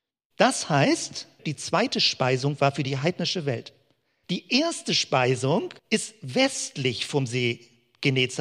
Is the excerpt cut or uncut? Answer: cut